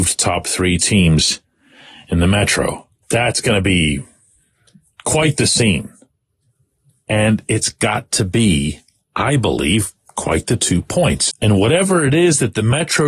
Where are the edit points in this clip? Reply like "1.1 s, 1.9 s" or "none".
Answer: 3.0 s, 11.3 s

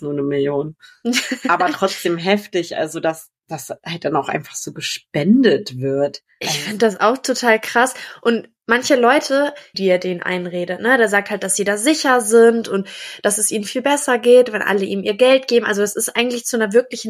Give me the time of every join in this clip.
9.7 s

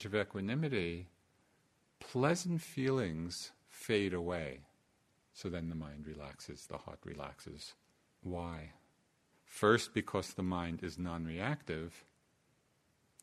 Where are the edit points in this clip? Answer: 5.2 s, 8.1 s

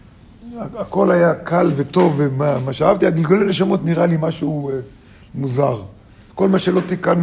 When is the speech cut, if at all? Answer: 6.3 s

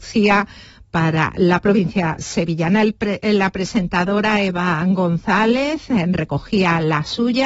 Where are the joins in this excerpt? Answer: none

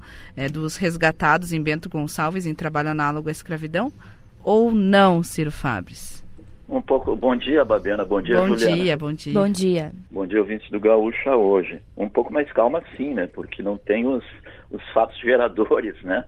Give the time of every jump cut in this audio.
10.1 s

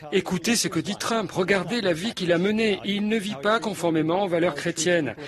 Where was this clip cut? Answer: none

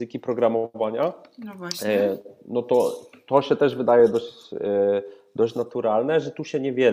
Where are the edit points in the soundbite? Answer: none

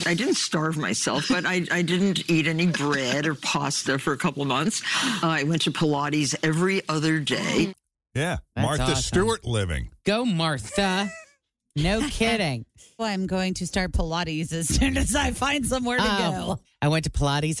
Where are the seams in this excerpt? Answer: 13.0 s, 16.6 s

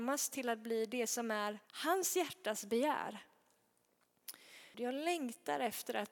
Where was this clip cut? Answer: 1.6 s, 4.7 s

